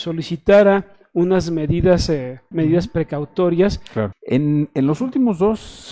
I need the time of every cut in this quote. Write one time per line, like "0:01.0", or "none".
0:02.5
0:04.1